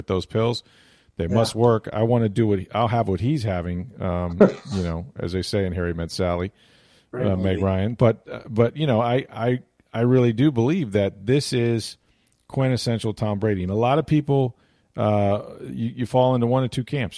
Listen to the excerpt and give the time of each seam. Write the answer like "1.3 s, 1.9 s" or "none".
none